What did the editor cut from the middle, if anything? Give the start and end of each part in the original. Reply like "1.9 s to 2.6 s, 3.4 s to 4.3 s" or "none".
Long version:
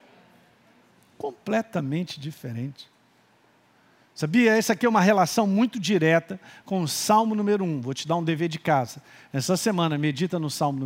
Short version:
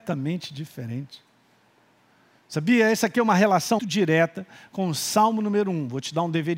5.4 s to 5.7 s